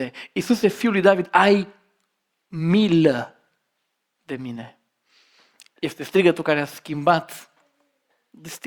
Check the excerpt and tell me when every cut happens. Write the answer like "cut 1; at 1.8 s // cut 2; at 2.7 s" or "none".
none